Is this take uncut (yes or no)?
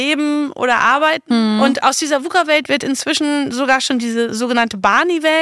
yes